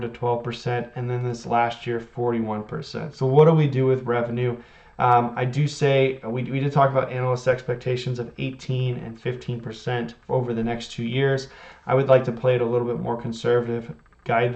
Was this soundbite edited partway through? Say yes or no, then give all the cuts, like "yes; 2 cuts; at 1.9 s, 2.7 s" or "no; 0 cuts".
no; 0 cuts